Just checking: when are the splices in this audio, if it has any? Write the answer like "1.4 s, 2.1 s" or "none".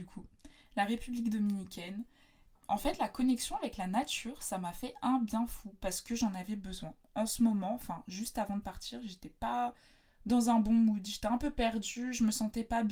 none